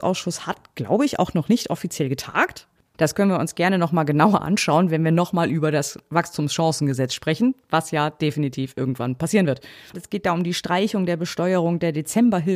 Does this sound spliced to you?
yes; 2 cuts; at 2.9 s, 9.9 s

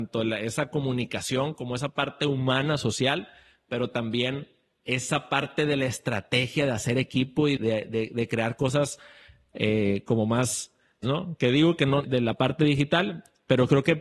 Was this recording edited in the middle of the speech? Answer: yes; 3 cuts; at 7.6 s, 11.0 s, 12.0 s

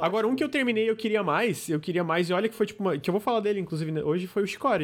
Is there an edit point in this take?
no; 0 cuts

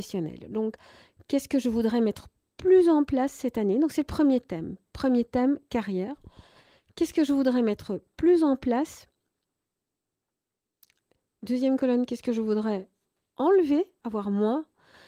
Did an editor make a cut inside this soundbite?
no; 0 cuts

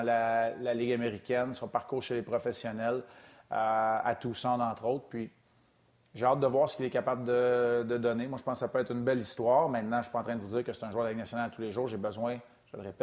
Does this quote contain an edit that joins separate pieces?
no; 0 cuts

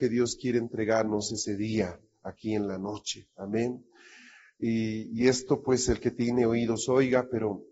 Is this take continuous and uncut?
yes; 0 cuts

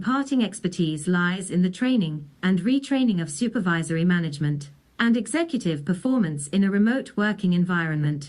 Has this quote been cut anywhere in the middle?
no; 0 cuts

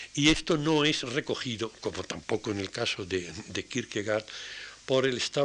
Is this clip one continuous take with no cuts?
yes; 0 cuts

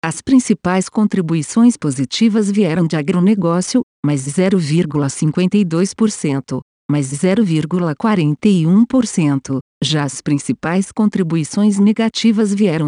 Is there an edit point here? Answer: yes; 1 cut; at 6.8 s

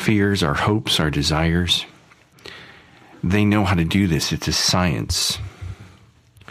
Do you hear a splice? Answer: no; 0 cuts

